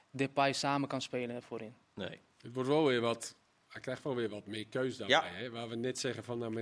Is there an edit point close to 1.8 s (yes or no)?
yes